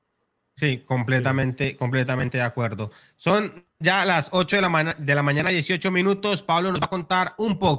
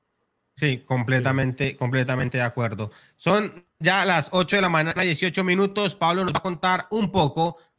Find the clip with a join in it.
second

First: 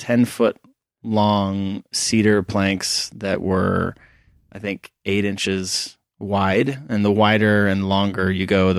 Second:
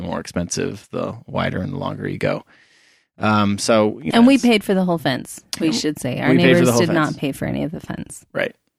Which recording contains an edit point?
second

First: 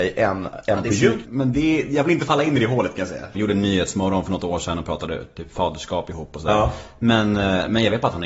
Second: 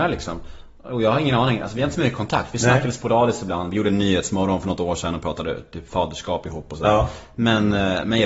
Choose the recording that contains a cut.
first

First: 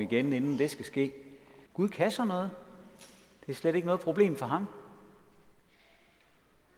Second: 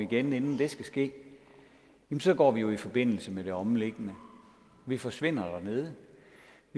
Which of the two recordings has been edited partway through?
first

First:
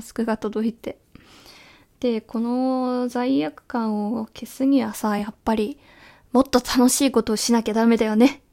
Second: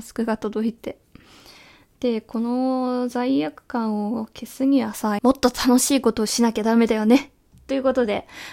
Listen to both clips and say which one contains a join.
second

